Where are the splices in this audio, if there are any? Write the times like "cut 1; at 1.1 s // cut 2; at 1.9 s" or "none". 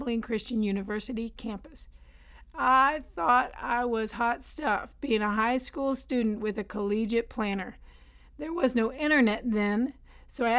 none